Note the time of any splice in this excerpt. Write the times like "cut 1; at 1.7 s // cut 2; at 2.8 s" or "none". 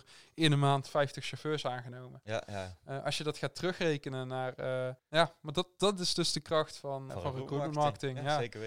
cut 1; at 5.0 s // cut 2; at 7.1 s